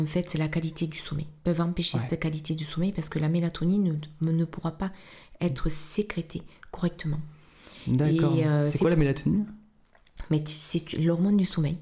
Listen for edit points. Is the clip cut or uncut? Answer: uncut